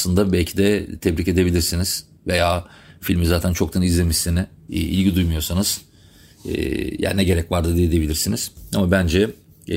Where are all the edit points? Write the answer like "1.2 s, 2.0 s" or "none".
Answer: 4.7 s